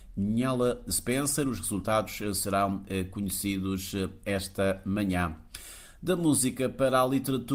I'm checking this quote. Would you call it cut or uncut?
uncut